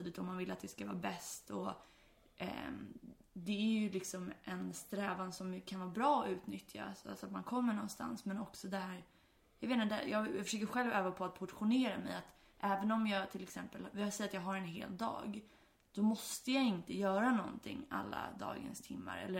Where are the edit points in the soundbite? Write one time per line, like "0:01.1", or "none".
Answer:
none